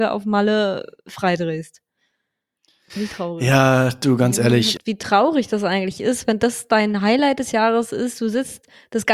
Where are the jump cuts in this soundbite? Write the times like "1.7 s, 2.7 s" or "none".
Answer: 4.8 s